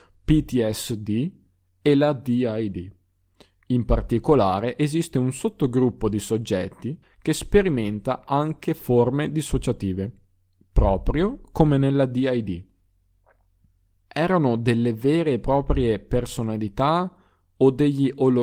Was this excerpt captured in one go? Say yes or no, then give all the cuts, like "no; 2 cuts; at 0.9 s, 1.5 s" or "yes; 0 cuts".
no; 2 cuts; at 7.0 s, 13.9 s